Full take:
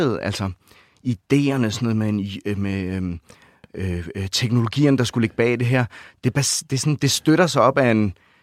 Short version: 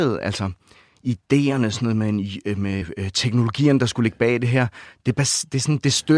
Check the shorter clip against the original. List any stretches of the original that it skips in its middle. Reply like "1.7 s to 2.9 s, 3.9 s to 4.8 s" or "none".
2.8 s to 4.0 s